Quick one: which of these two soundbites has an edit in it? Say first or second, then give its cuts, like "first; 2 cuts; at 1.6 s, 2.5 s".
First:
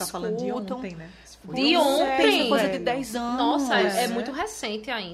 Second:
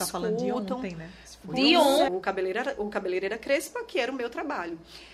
second; 1 cut; at 2.1 s